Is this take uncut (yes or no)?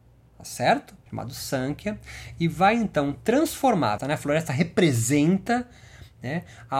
no